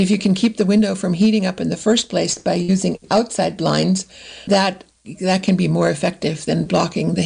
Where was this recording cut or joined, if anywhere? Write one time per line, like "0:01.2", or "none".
0:04.5